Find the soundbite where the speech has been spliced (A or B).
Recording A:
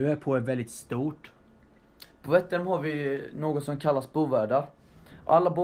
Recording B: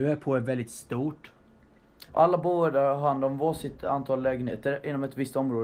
B